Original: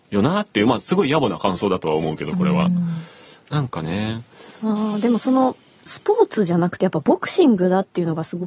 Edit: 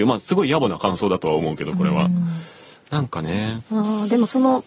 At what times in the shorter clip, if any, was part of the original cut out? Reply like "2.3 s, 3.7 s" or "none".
3.7 s